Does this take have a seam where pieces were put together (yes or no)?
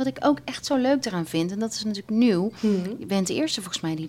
no